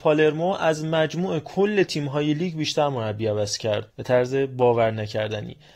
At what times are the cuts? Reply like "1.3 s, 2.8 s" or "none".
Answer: 3.9 s